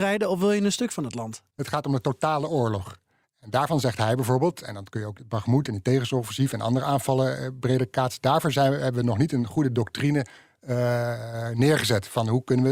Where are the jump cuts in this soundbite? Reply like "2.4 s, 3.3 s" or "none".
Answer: 1.5 s, 3.2 s